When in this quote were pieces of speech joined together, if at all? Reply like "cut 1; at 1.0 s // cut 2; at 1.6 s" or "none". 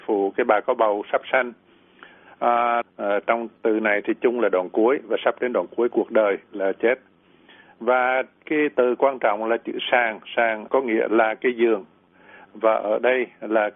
cut 1; at 2.8 s